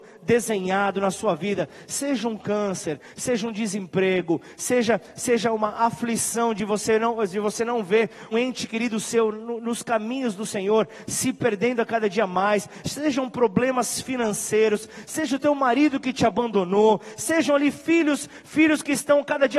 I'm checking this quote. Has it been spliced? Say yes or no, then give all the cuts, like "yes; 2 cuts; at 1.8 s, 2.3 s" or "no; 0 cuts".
yes; 1 cut; at 8.3 s